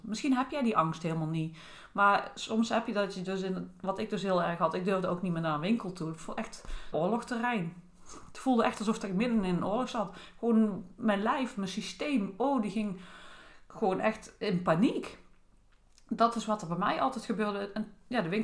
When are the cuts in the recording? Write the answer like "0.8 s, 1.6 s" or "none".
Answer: 6.9 s